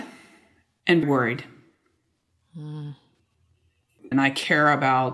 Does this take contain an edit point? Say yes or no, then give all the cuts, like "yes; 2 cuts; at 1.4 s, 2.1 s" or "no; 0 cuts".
yes; 2 cuts; at 1.0 s, 4.1 s